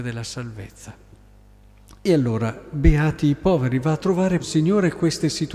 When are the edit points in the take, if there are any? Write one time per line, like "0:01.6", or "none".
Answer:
0:04.4